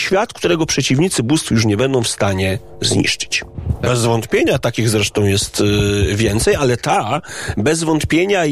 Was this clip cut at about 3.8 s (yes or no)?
yes